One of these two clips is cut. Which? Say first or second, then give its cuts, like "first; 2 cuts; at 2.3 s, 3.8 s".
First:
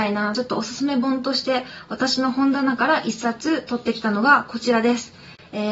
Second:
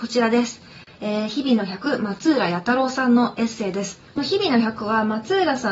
second; 1 cut; at 4.1 s